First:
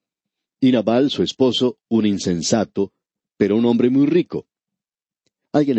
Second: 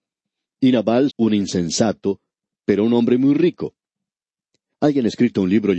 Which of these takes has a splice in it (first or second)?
second